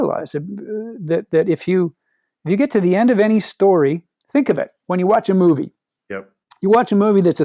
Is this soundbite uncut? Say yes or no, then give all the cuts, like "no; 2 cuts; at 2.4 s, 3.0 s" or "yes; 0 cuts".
yes; 0 cuts